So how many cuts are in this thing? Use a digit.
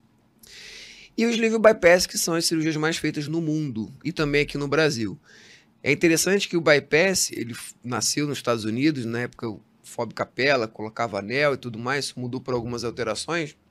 1